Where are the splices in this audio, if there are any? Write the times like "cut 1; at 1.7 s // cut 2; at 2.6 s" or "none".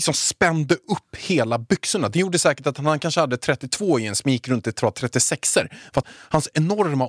cut 1; at 6.0 s

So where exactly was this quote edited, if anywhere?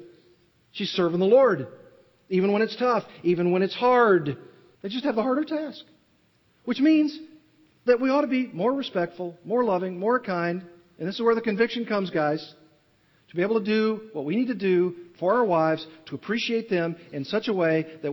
cut 1; at 4.7 s

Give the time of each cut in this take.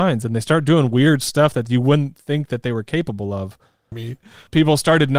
cut 1; at 3.9 s

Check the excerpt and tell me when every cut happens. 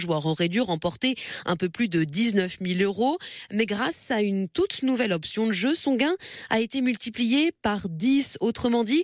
none

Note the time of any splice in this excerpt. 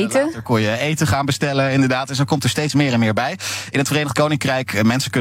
none

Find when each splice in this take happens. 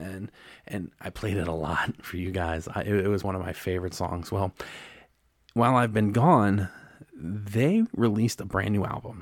cut 1; at 3.2 s

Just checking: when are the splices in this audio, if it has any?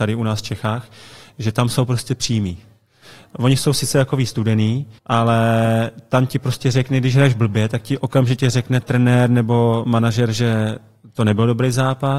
cut 1; at 5.0 s

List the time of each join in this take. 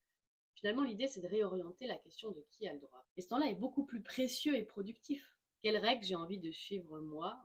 cut 1; at 3.0 s // cut 2; at 5.6 s

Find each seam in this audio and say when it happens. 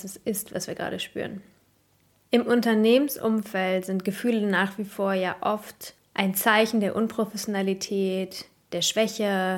none

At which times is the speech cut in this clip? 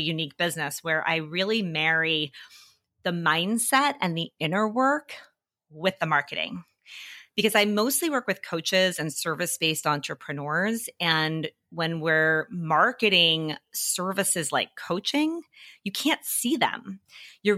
none

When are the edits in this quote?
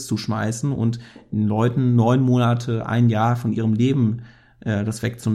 none

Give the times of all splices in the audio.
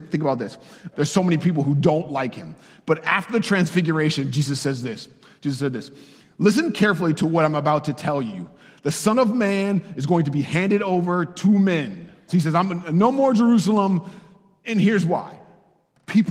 cut 1; at 0.9 s // cut 2; at 12.3 s // cut 3; at 14.6 s

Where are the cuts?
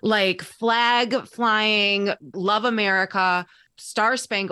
cut 1; at 2.3 s

